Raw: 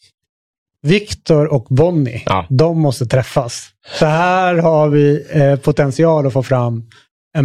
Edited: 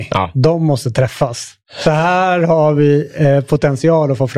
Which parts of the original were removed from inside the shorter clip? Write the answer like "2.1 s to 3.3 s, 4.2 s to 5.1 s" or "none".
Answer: none